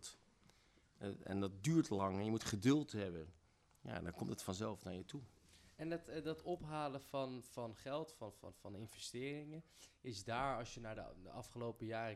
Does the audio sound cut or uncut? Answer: uncut